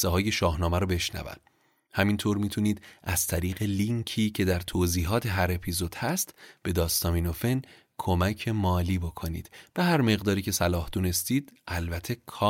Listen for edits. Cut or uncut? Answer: uncut